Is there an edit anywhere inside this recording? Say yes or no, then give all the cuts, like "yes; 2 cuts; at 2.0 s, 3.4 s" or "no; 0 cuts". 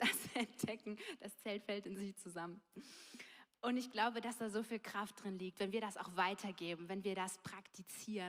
no; 0 cuts